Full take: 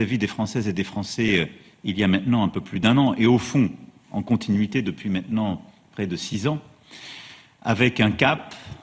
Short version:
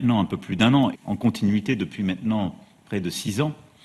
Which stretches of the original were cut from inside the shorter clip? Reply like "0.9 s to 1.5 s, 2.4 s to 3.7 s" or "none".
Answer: 3.2 s to 4.0 s